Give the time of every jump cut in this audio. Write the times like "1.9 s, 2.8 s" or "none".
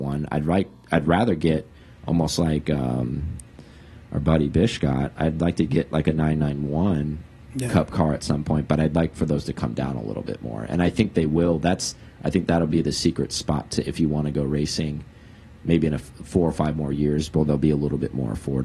none